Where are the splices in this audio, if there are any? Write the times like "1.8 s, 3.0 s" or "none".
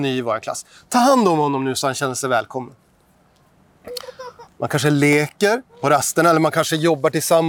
4.5 s, 5.7 s